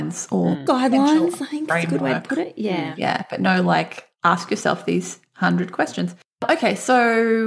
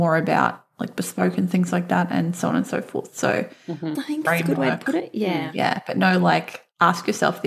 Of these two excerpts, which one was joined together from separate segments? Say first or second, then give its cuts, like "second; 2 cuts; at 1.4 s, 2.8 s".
second; 1 cut; at 4.0 s